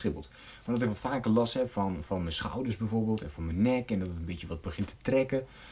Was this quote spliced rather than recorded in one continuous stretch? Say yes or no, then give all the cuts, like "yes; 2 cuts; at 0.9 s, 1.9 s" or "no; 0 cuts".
no; 0 cuts